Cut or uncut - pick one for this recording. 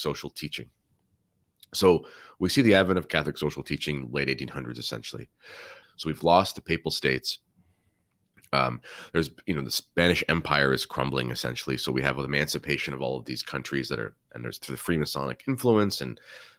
cut